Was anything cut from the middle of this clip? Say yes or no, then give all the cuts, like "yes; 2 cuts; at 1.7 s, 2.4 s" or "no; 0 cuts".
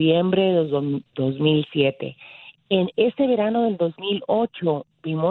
no; 0 cuts